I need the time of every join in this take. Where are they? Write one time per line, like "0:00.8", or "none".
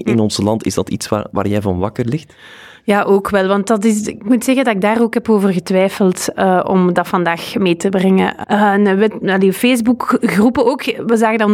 0:08.4